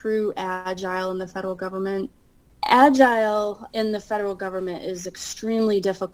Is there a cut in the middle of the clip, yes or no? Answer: no